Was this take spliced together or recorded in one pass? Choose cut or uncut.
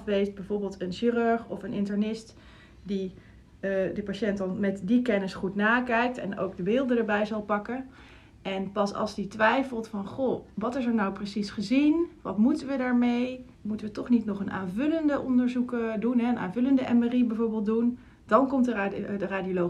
cut